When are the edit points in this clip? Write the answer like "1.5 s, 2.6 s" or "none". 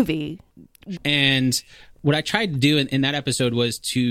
1.0 s